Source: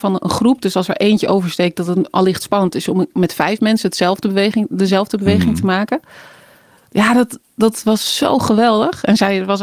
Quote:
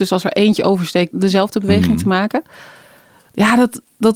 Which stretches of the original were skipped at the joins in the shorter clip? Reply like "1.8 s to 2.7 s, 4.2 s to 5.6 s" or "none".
1.8 s to 4.7 s